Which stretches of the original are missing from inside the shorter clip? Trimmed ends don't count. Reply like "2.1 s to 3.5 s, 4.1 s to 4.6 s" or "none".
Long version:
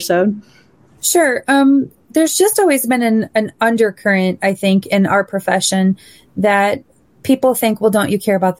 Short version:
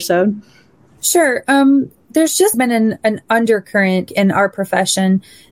2.5 s to 2.8 s, 4.4 s to 4.8 s